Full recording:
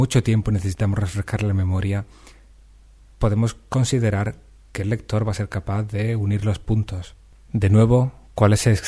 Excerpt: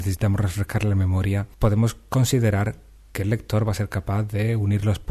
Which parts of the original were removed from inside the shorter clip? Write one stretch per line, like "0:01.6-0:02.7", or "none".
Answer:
0:02.1-0:03.1